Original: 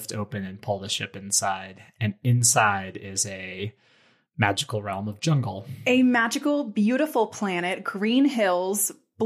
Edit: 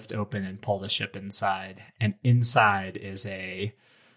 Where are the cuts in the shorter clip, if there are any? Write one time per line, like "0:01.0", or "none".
none